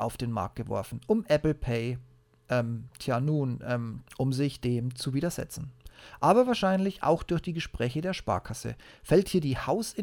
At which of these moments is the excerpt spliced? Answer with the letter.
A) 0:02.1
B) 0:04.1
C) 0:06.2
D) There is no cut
B